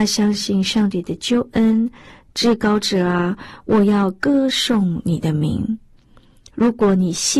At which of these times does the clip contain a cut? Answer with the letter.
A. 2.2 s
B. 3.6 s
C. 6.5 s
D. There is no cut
A